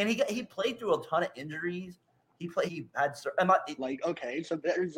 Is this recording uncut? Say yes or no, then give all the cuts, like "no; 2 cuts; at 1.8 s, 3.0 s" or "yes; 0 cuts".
no; 2 cuts; at 2.7 s, 3.8 s